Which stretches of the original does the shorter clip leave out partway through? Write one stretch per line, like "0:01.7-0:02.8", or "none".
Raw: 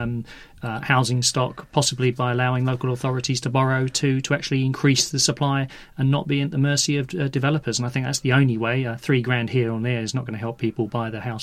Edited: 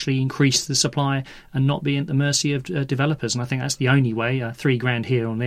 none